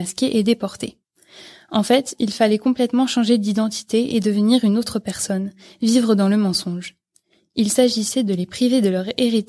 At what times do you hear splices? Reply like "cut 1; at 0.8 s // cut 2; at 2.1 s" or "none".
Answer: none